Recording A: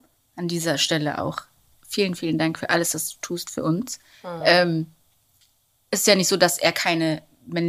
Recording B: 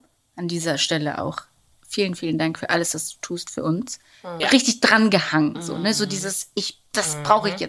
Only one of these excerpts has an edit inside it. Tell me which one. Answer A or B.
B